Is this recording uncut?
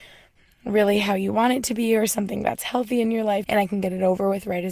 no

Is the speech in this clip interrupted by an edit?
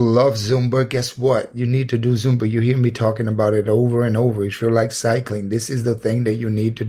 no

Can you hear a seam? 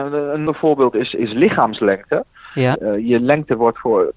yes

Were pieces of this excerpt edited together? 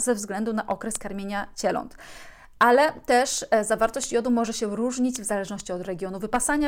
no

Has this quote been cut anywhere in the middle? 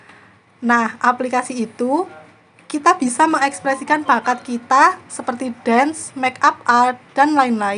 no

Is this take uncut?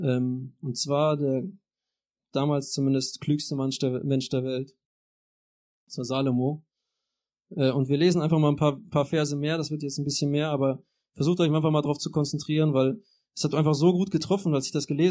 yes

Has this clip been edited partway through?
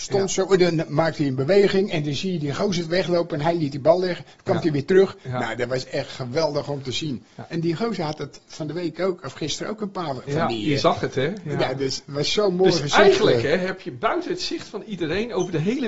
no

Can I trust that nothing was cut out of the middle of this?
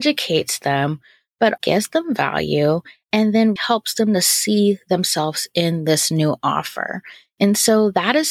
no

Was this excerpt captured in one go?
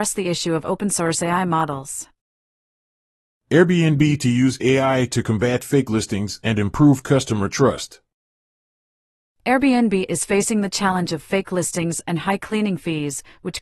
yes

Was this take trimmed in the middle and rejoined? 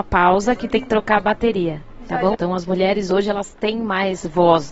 yes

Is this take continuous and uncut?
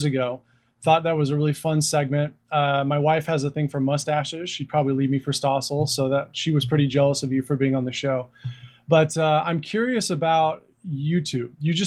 yes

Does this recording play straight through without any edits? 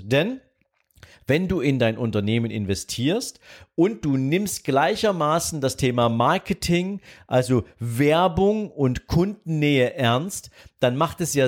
yes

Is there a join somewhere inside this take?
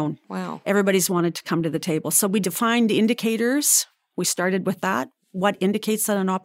no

